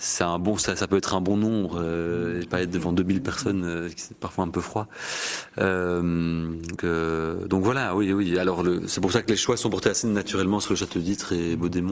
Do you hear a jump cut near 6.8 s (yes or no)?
yes